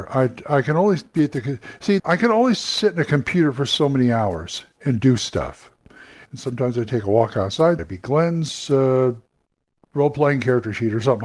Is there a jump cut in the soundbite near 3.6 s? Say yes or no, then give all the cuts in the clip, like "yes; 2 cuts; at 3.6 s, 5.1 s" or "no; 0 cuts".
no; 3 cuts; at 2.0 s, 6.3 s, 7.8 s